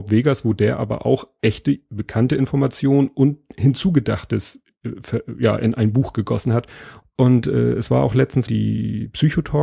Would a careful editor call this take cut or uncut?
cut